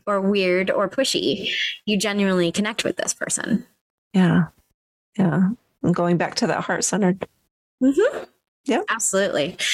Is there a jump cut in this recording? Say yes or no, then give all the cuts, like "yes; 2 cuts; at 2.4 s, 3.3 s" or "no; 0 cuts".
no; 0 cuts